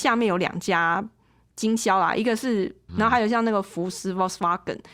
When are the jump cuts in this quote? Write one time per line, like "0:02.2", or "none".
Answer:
0:02.9